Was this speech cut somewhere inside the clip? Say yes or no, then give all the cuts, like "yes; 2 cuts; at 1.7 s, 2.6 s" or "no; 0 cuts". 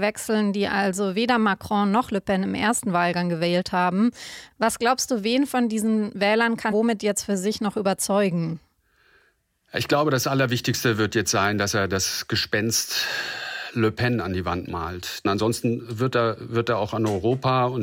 yes; 1 cut; at 6.7 s